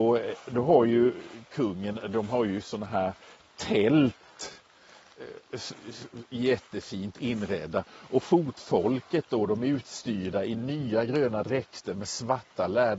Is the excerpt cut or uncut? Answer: uncut